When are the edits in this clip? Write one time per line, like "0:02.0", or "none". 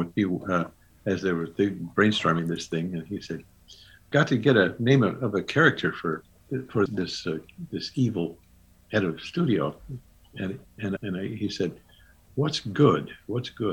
0:06.9
0:11.0